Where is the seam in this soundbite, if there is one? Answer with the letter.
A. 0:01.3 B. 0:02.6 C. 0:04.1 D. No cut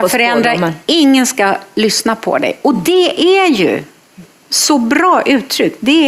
D